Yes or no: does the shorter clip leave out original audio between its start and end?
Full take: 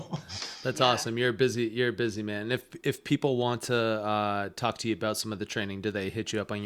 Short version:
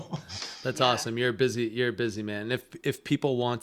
no